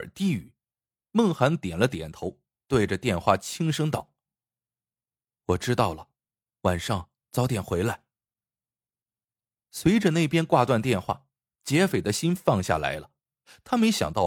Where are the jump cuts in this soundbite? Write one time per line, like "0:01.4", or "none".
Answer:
none